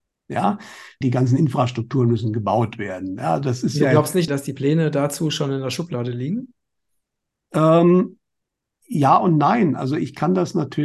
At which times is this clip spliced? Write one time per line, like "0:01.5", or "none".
0:01.0
0:04.3